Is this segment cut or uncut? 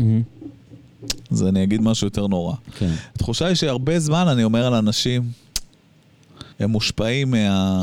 cut